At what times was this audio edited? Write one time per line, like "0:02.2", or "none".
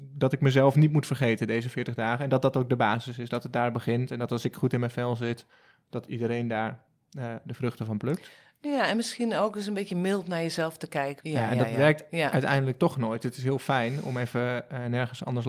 0:11.2